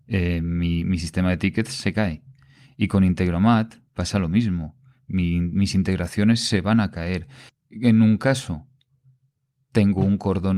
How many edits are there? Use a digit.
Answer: 1